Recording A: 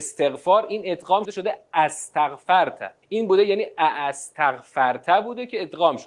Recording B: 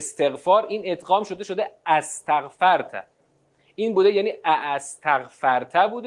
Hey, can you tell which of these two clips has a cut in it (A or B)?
A